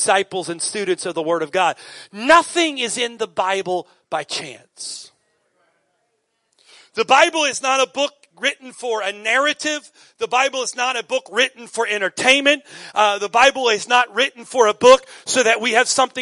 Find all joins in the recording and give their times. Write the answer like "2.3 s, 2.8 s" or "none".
none